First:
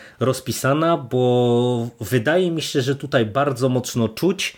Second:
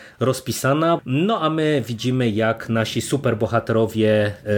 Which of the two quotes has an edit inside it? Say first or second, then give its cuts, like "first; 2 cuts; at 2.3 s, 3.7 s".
second; 1 cut; at 1.0 s